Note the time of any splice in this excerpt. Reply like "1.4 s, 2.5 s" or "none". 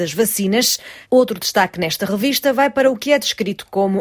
1.0 s